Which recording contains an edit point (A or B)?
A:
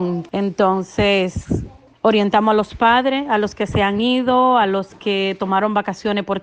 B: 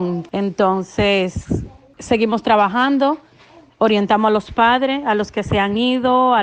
A